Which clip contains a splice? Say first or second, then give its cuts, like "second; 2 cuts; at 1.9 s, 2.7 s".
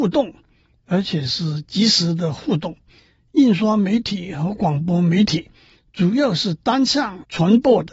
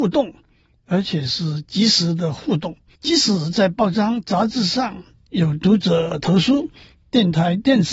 second; 1 cut; at 2.9 s